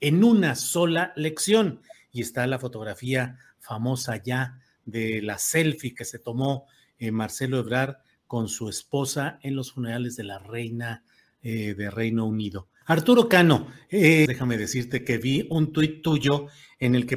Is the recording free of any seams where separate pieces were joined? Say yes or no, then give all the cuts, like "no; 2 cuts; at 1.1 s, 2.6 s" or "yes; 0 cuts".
no; 2 cuts; at 12.8 s, 14.3 s